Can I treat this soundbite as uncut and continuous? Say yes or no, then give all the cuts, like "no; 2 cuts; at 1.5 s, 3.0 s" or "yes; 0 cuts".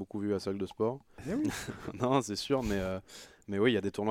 no; 1 cut; at 1.2 s